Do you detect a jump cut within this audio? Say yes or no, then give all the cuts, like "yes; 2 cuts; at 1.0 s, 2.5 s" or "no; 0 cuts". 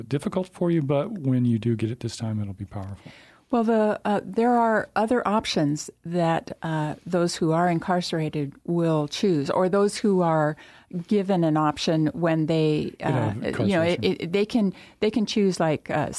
no; 0 cuts